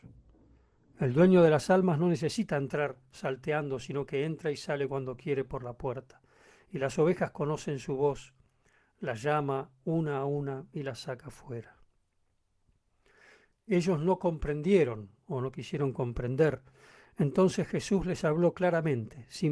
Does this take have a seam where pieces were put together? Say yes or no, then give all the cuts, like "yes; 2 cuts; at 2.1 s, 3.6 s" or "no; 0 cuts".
no; 0 cuts